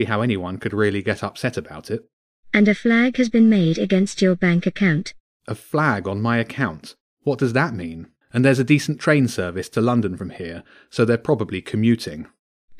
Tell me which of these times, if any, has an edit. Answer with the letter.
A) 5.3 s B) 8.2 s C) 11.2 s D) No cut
B